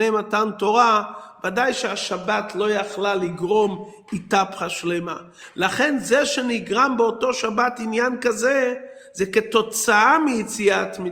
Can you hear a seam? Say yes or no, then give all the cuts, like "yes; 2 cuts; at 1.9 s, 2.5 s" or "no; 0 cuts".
no; 0 cuts